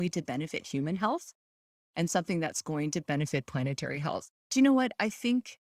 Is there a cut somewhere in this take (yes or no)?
yes